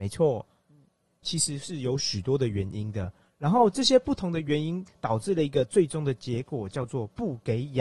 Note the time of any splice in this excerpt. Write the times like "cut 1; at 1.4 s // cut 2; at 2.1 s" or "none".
cut 1; at 1.2 s